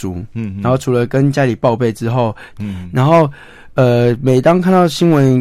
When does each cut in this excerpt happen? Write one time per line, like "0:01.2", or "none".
0:02.5